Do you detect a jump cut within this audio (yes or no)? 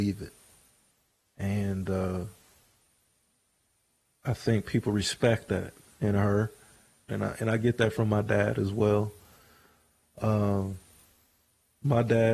yes